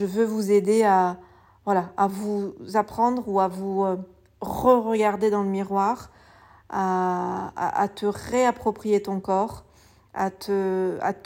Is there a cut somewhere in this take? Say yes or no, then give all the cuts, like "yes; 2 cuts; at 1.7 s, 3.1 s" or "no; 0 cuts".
no; 0 cuts